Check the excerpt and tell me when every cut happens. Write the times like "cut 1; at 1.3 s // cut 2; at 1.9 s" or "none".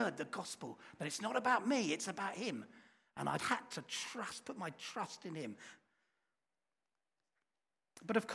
cut 1; at 3.4 s